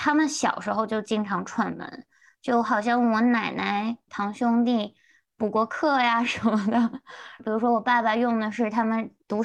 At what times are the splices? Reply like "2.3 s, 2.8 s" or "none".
4.1 s, 7.4 s